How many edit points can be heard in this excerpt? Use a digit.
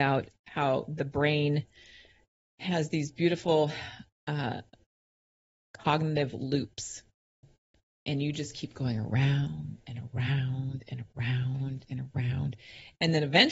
0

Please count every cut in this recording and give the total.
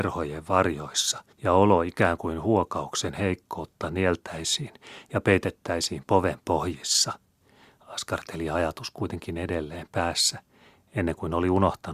1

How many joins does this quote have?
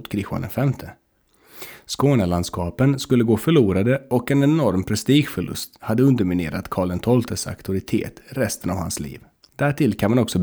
0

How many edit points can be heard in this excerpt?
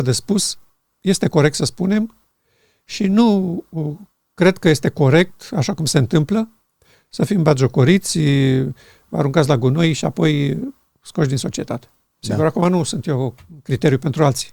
2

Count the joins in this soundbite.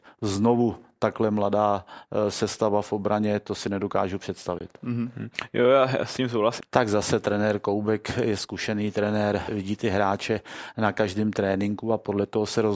2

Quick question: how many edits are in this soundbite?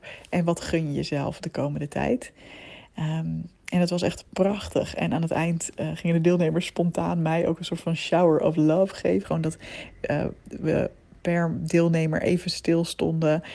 1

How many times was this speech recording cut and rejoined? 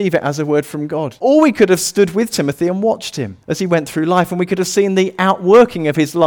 2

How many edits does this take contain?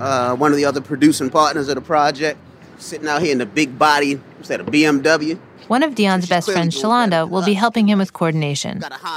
0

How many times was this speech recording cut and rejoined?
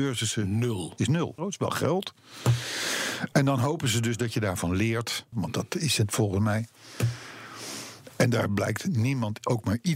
2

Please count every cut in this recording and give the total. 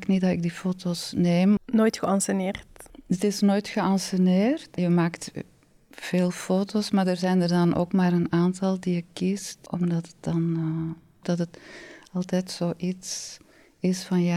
1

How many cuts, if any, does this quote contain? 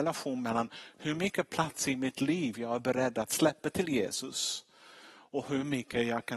0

